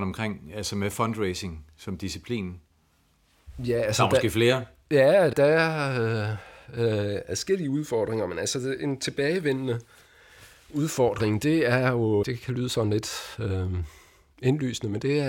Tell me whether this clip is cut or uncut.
cut